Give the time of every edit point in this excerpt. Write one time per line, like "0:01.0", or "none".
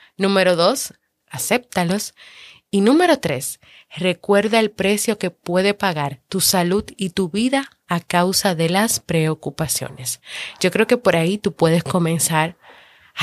0:01.2